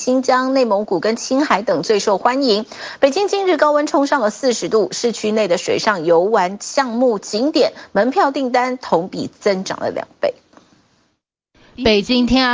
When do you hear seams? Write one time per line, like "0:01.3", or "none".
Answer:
none